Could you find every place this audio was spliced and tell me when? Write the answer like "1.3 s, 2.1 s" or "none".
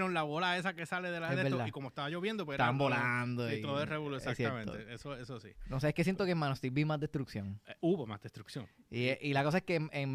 none